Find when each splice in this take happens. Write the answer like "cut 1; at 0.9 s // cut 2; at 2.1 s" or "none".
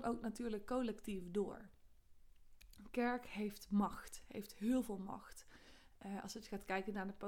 none